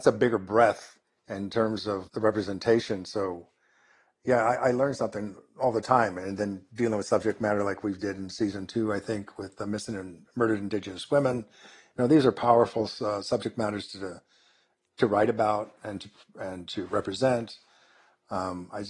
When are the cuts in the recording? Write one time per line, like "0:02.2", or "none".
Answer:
0:02.1